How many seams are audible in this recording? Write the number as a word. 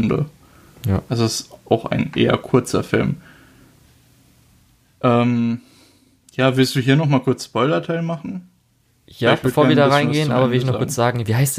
zero